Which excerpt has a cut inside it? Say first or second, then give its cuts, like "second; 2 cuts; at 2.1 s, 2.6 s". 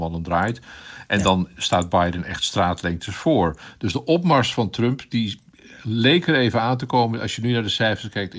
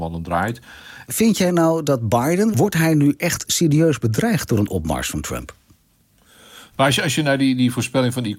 second; 3 cuts; at 1.1 s, 2.5 s, 6.7 s